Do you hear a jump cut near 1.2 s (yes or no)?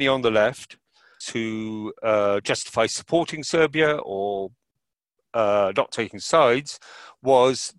yes